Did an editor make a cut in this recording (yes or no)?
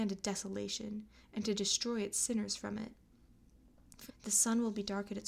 yes